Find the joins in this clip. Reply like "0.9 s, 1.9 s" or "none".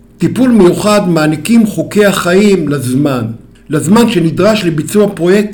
none

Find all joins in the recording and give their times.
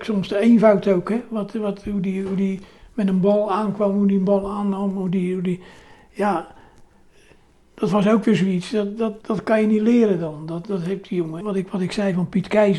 9.2 s, 11.4 s

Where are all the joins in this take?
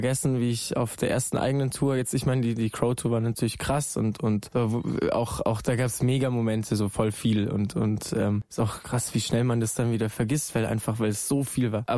none

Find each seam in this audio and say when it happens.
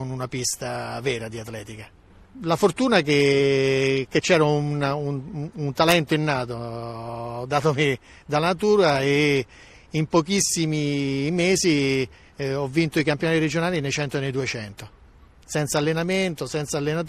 none

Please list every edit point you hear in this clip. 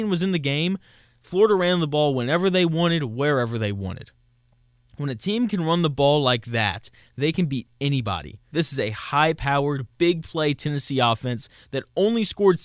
8.5 s

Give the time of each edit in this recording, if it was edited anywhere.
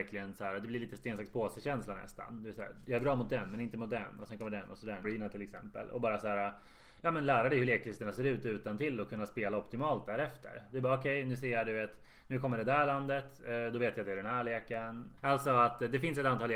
5.0 s, 15.2 s

